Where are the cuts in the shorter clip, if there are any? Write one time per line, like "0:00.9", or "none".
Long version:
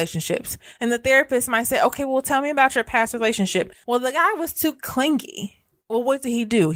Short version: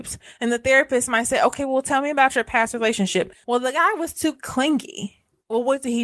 none